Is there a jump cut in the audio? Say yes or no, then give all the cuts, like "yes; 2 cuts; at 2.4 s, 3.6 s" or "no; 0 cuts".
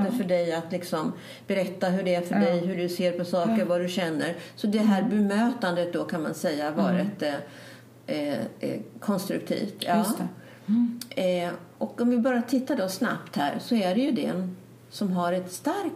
no; 0 cuts